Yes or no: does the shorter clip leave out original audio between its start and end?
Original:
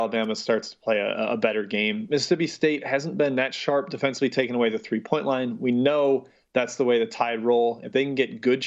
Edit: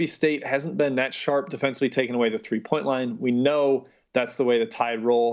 no